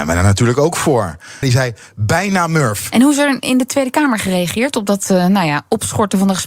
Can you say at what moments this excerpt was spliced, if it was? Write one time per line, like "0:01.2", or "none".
0:01.4
0:02.9

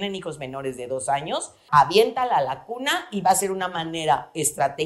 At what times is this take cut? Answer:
0:01.7

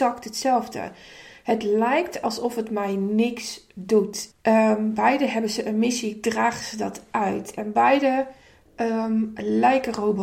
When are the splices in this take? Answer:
0:04.3

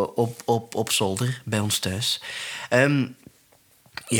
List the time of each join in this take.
none

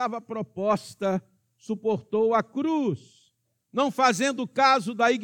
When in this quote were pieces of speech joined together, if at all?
none

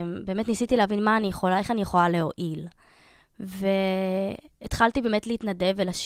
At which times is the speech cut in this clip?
none

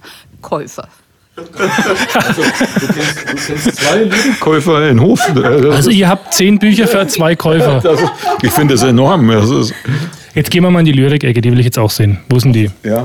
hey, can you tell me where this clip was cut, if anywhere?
none

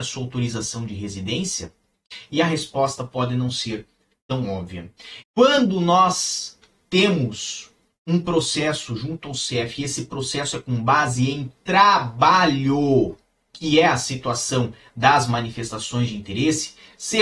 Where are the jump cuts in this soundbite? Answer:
0:05.2

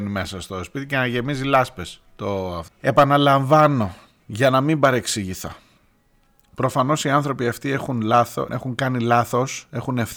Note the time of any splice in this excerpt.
0:02.7
0:08.5

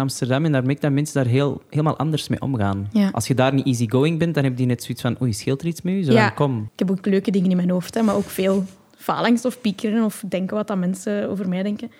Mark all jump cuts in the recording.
0:06.7

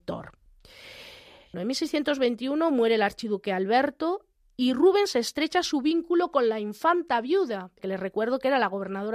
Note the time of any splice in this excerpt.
0:01.5
0:07.8

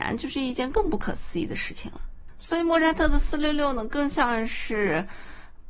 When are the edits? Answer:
0:02.4

